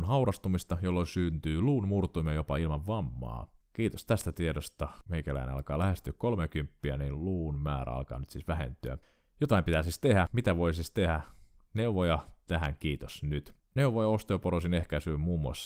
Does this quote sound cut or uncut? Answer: cut